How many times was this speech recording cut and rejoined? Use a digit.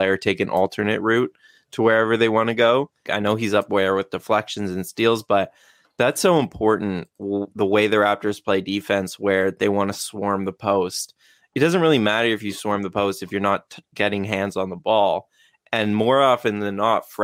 1